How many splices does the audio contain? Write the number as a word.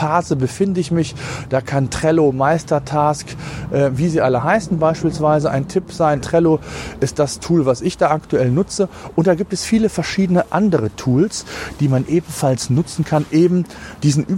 two